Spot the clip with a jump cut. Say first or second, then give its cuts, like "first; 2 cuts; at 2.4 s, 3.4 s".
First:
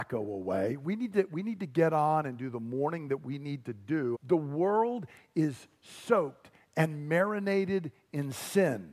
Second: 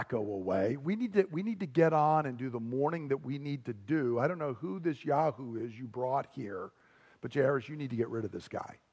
first; 1 cut; at 4.1 s